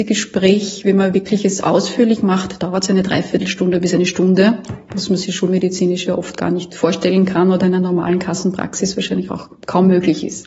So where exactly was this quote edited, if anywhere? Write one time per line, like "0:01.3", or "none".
none